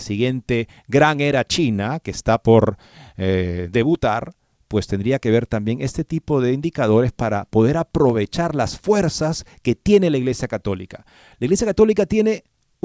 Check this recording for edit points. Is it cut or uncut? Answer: uncut